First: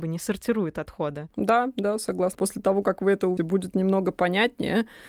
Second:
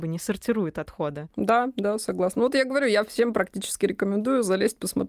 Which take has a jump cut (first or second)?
first